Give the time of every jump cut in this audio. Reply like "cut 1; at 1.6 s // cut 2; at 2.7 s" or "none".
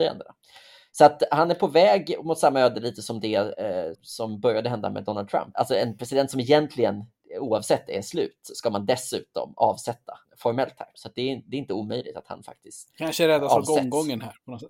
cut 1; at 3.9 s // cut 2; at 10.9 s // cut 3; at 12.9 s